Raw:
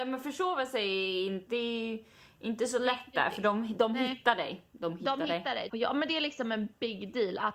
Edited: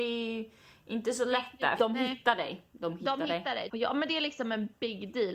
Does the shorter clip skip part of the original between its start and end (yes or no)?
yes